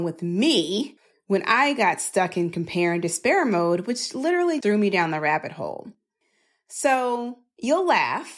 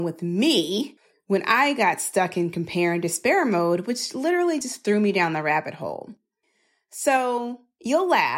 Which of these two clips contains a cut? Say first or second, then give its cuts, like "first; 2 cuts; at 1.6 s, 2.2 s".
first; 1 cut; at 4.6 s